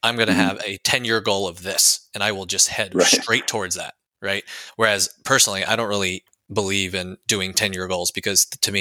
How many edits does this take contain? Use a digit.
0